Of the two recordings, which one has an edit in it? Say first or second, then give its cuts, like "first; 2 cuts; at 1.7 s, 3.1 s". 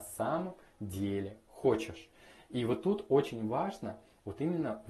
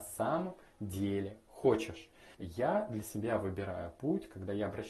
second; 1 cut; at 2.3 s